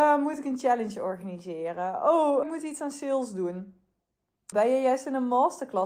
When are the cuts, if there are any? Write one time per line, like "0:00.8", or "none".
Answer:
0:02.4
0:04.5